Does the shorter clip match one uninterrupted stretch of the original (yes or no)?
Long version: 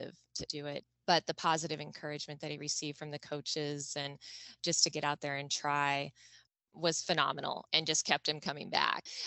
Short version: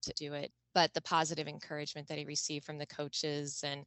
yes